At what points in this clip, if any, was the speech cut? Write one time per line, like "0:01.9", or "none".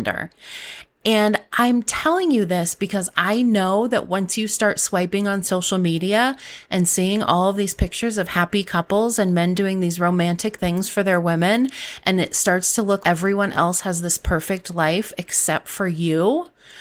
0:13.0